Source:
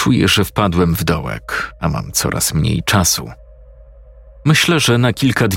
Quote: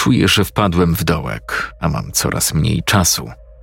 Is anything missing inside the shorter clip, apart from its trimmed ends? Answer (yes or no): no